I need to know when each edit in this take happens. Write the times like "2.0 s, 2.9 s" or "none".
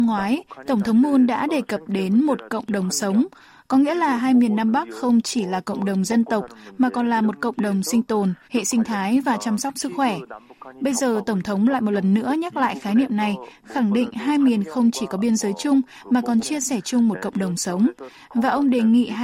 8.5 s